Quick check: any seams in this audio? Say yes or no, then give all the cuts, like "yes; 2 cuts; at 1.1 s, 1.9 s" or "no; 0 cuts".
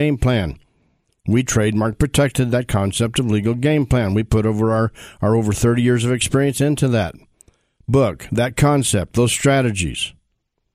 no; 0 cuts